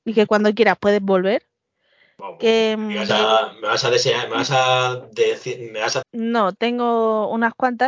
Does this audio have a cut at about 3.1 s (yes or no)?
yes